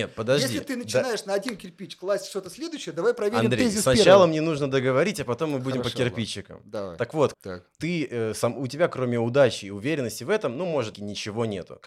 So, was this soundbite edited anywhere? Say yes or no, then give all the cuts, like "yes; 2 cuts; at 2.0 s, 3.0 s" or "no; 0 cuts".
yes; 2 cuts; at 7.3 s, 10.9 s